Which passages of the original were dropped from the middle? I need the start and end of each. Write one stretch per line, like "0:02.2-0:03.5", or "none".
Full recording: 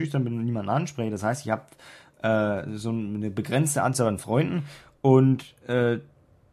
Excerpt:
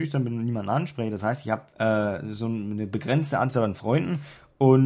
0:01.7-0:02.1